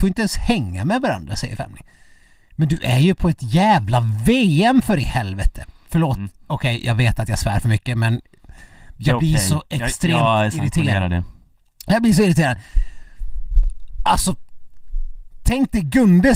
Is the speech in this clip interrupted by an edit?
no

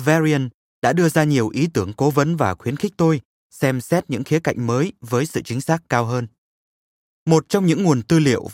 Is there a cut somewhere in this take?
no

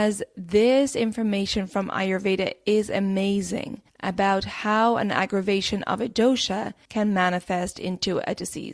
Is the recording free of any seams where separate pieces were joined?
no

